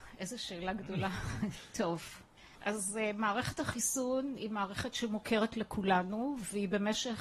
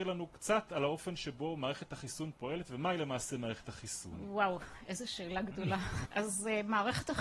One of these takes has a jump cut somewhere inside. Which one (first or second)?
second